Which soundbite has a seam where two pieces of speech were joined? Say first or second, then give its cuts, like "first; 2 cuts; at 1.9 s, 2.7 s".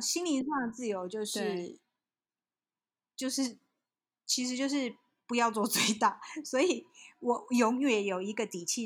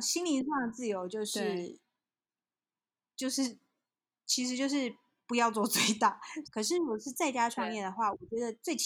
second; 1 cut; at 6.4 s